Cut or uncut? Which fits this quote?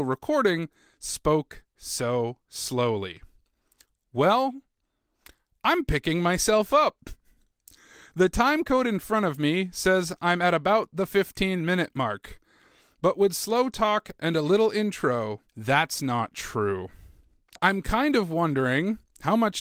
cut